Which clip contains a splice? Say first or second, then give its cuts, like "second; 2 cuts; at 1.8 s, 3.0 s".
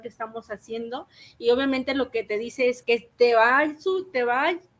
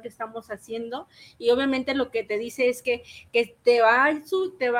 first; 1 cut; at 2.8 s